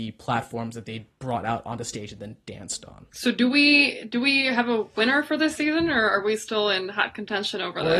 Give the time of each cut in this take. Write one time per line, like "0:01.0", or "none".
0:03.1